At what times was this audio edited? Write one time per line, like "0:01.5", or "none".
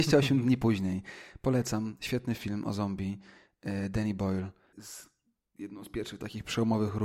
0:04.7